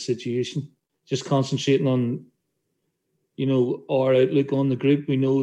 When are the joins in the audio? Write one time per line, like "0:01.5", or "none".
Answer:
none